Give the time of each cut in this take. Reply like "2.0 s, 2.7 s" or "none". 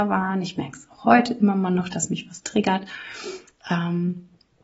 none